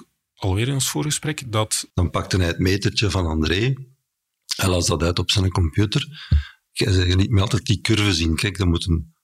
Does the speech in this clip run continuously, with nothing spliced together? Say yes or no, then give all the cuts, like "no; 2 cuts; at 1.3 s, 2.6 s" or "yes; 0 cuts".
no; 2 cuts; at 1.9 s, 6.7 s